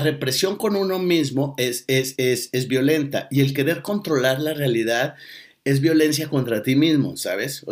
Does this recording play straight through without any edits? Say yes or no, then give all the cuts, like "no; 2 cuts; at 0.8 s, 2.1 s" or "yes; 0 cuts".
no; 1 cut; at 2.2 s